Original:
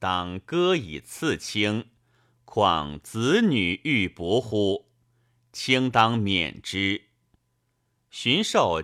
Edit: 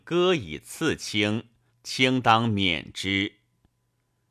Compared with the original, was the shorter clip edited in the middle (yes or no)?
yes